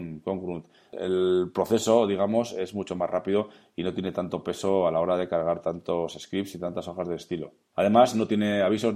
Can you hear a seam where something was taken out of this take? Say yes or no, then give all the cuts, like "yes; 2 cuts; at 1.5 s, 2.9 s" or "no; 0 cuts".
no; 0 cuts